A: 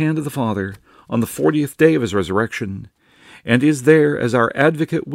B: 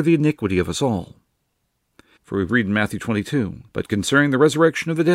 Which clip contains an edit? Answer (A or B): B